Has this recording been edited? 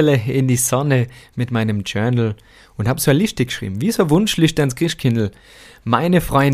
no; 0 cuts

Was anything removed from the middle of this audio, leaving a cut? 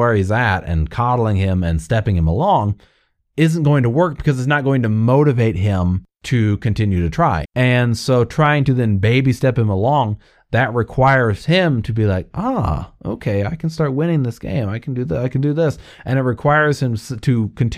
yes; 1 cut; at 7.4 s

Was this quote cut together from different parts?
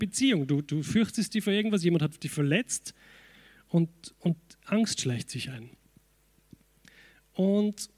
no; 0 cuts

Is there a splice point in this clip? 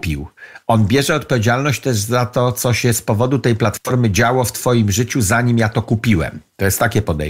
no; 0 cuts

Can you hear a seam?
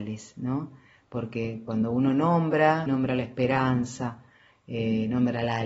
yes; 1 cut; at 2.9 s

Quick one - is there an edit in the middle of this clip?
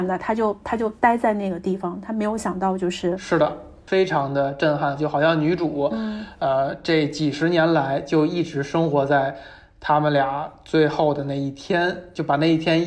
yes; 1 cut; at 5.0 s

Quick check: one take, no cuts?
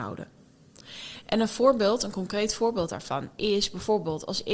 yes; 0 cuts

